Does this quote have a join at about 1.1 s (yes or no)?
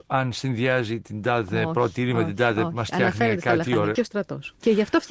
no